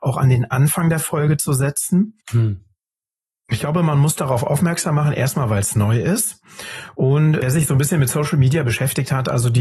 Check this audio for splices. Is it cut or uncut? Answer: cut